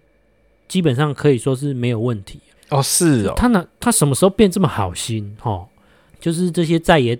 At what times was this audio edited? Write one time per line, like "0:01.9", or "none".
0:02.6
0:06.1